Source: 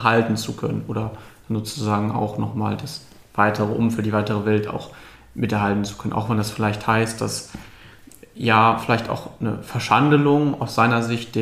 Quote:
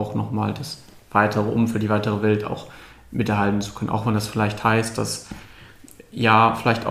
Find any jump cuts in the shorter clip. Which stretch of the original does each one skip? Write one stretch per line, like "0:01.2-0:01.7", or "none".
none